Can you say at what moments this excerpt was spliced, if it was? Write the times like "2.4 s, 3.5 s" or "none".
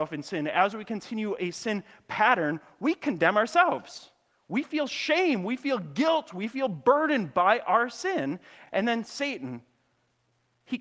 none